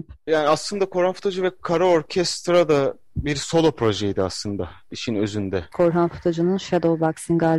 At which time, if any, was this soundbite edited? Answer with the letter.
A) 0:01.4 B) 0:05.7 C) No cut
B